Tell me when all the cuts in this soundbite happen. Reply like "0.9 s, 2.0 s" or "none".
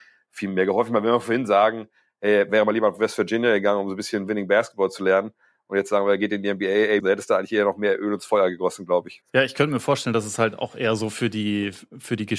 7.0 s, 9.2 s